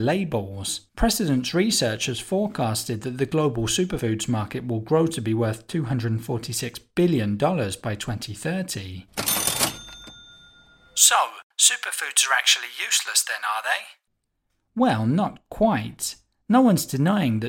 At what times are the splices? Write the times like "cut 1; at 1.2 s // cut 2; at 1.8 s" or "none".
none